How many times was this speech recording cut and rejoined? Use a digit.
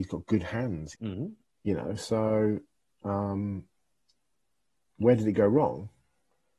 1